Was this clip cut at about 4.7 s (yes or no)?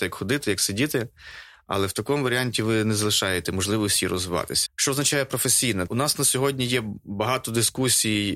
yes